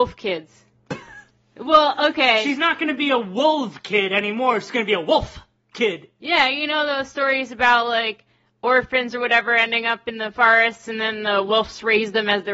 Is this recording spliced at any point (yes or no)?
no